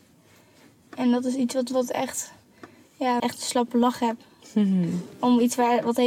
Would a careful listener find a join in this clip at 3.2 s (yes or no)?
yes